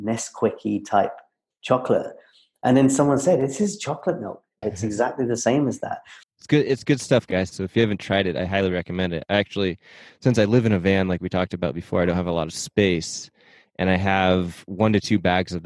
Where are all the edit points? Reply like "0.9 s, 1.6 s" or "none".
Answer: 4.6 s, 6.2 s

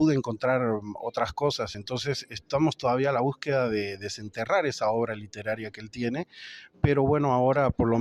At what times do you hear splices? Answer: none

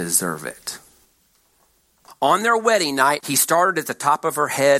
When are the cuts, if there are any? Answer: 2.1 s, 3.2 s

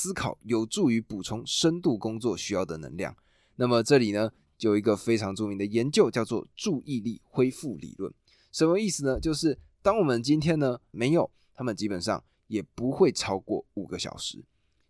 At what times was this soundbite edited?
10.9 s

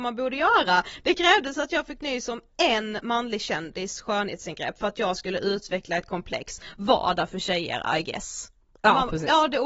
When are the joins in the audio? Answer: none

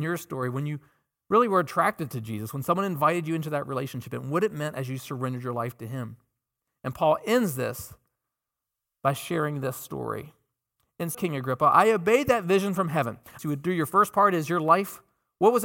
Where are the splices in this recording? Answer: 11.1 s, 13.4 s

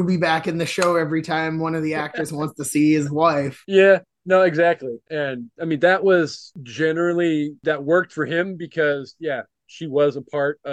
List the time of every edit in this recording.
none

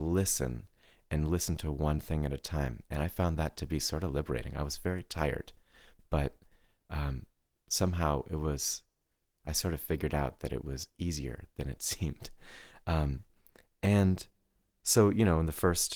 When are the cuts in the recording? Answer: none

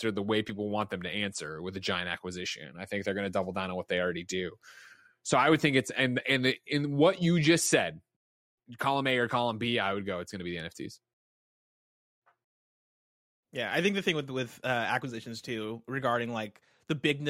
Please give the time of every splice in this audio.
none

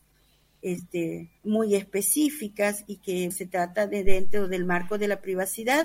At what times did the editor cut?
1.4 s, 3.3 s

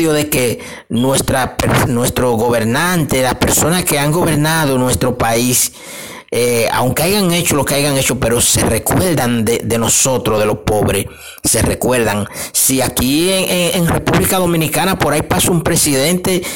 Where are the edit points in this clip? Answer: none

